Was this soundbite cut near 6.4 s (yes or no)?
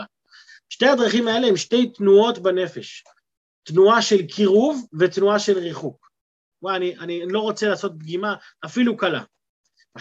yes